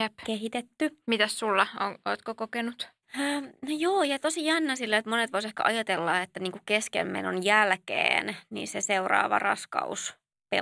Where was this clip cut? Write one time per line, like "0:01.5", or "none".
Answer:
none